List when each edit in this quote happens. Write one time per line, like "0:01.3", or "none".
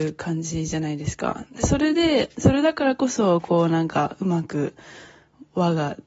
none